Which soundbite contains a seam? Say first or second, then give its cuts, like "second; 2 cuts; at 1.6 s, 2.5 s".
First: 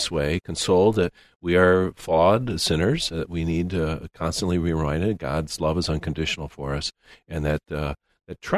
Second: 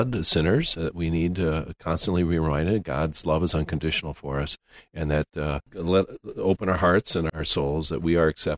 second; 2 cuts; at 5.7 s, 7.3 s